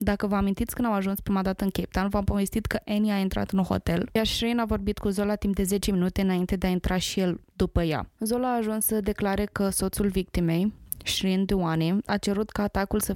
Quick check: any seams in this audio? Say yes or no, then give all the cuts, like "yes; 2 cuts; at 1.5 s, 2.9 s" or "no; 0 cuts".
yes; 1 cut; at 8.1 s